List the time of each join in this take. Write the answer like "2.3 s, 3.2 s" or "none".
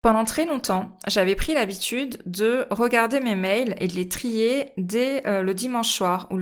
none